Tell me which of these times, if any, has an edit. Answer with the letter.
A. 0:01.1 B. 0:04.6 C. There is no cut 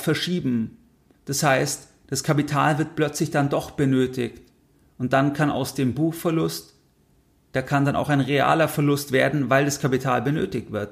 C